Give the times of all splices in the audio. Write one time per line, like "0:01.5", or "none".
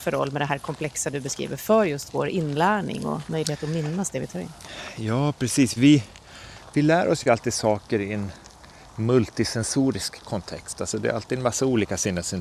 none